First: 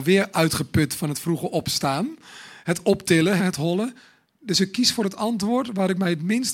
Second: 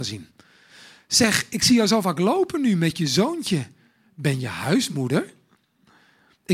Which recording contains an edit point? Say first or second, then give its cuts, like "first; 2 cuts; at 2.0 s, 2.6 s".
first; 1 cut; at 3.4 s